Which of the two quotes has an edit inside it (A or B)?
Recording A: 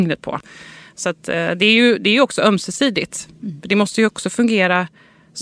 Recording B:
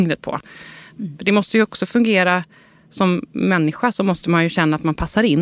B